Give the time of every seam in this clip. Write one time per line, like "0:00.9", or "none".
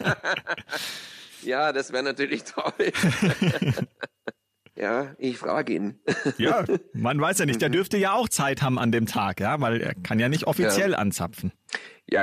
none